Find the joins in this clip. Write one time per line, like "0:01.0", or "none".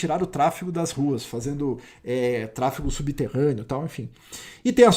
none